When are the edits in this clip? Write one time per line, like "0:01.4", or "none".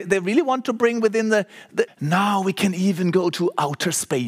0:01.9